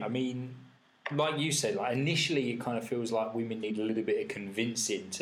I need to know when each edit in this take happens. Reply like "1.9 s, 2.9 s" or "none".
none